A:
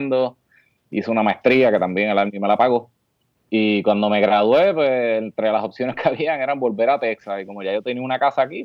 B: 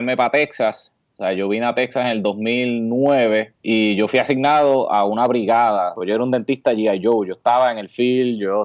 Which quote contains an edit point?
B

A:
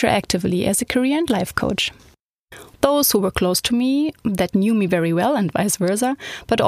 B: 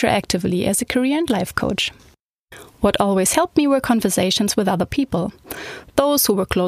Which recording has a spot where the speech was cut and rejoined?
A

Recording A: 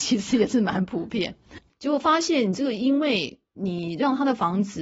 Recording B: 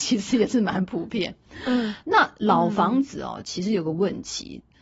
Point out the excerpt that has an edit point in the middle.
A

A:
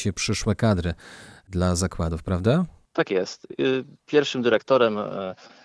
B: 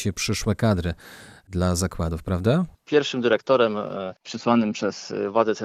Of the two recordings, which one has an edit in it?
B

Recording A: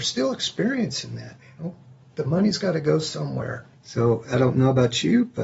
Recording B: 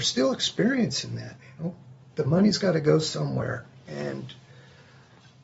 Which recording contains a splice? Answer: A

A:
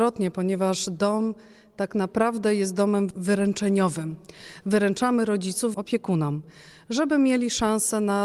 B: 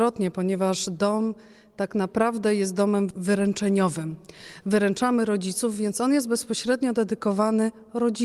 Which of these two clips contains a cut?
A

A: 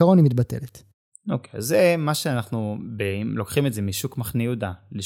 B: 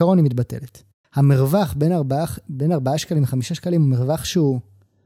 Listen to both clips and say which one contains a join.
B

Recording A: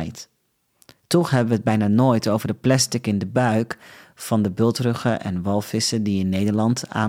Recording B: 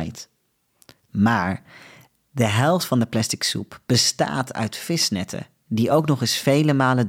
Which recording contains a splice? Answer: B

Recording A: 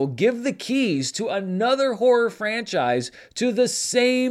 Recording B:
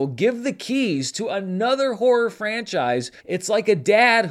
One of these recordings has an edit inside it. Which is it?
B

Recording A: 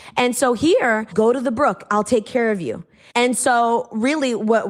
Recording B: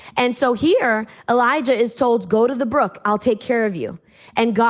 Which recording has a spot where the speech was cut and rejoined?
A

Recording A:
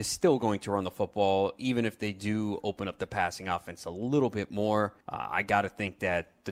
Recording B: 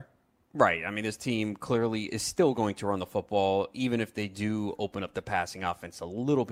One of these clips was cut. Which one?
A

